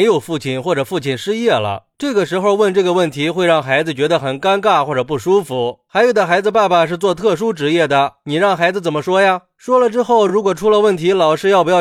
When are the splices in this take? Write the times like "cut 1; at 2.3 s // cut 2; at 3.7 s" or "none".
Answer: none